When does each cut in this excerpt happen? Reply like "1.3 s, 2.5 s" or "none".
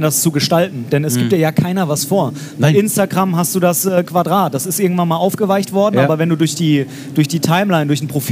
none